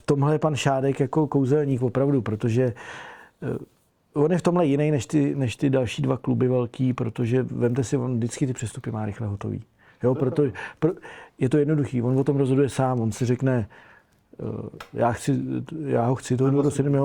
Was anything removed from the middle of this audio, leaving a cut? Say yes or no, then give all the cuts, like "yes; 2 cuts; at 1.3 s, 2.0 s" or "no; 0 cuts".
no; 0 cuts